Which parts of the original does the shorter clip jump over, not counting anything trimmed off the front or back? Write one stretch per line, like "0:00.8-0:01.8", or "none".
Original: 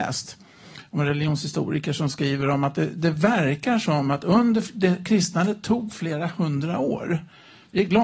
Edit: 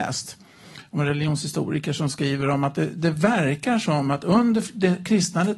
none